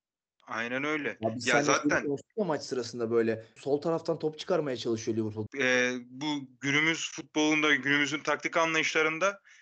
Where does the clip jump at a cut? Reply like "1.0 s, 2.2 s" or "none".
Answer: 3.6 s, 5.5 s